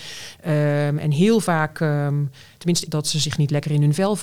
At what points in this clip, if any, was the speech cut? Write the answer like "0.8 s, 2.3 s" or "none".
2.9 s